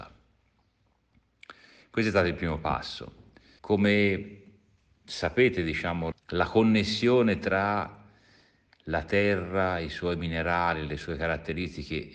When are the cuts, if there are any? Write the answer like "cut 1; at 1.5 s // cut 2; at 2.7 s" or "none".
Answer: cut 1; at 3.6 s // cut 2; at 6.1 s